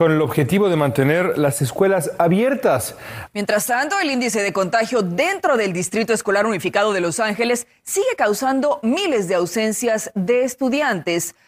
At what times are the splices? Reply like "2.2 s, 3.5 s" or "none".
3.3 s